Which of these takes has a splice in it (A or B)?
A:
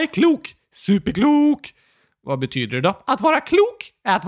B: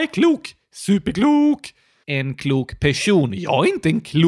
B